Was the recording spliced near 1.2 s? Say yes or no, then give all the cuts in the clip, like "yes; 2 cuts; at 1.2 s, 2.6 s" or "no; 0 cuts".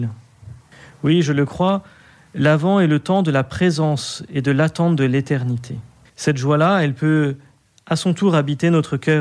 no; 1 cut; at 6.1 s